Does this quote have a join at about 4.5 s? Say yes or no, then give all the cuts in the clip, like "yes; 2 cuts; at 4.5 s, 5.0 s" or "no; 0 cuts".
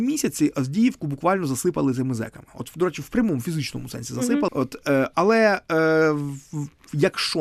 yes; 1 cut; at 4.5 s